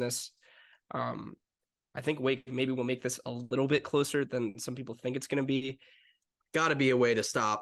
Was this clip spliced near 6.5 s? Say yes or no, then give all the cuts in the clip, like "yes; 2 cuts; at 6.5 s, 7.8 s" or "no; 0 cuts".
yes; 1 cut; at 6.5 s